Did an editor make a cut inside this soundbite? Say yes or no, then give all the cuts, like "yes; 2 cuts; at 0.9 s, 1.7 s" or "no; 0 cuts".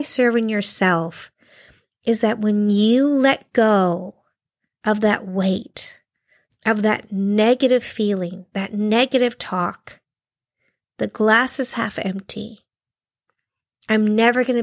yes; 1 cut; at 6.4 s